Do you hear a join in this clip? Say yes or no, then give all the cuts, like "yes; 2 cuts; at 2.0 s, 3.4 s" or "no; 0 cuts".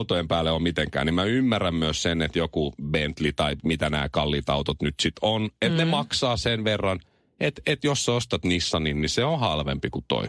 no; 0 cuts